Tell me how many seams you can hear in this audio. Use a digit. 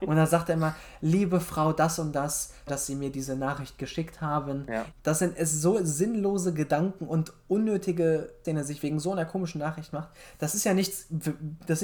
3